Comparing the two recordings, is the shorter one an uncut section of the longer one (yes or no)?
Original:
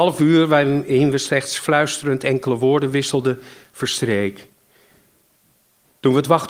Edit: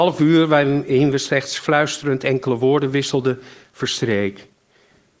yes